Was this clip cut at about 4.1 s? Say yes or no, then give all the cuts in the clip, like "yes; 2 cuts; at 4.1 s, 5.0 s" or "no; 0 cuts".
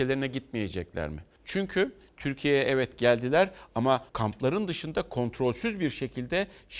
yes; 2 cuts; at 1.4 s, 4.1 s